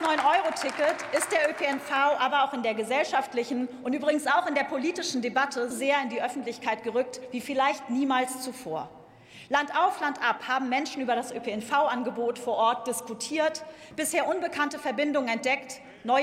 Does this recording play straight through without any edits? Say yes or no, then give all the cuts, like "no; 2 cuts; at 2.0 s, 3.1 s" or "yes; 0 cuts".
no; 1 cut; at 5.7 s